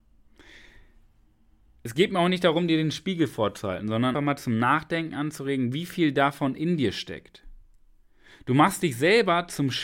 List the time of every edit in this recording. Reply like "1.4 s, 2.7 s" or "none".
4.1 s